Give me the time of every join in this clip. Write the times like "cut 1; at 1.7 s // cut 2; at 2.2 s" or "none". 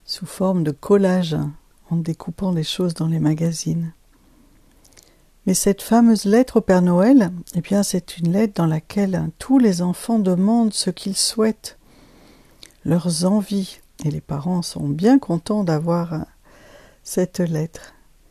cut 1; at 14.0 s